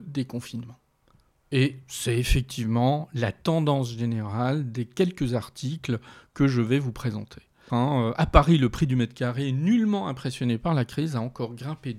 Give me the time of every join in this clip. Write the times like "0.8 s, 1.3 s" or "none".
7.7 s